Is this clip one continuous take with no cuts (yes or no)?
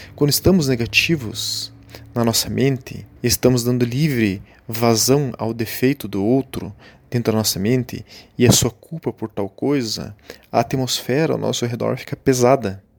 no